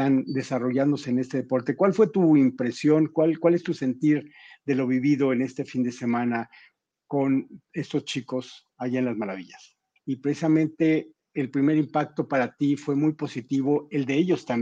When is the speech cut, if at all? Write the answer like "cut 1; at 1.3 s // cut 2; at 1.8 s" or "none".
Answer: cut 1; at 10.0 s